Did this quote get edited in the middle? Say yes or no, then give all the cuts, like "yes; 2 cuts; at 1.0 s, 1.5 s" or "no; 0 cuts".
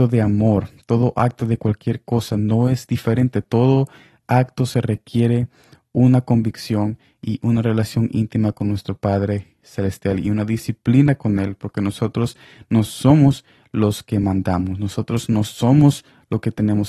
no; 0 cuts